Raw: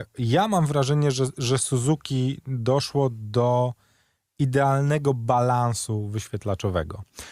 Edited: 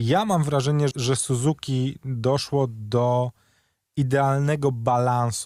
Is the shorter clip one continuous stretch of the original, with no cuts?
no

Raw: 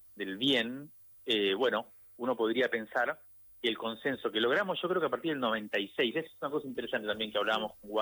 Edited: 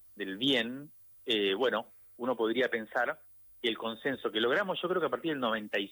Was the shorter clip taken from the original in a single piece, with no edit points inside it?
yes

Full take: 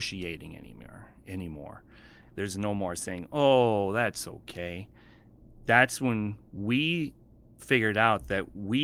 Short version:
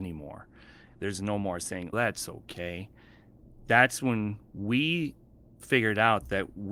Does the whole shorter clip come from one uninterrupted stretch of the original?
no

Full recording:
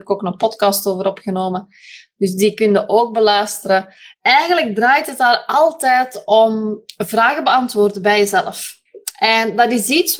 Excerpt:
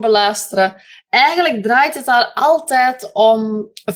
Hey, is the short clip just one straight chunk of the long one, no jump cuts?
yes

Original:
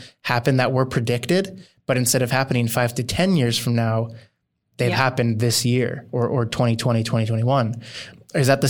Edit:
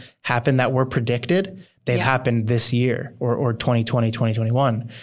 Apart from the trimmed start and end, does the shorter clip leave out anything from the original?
yes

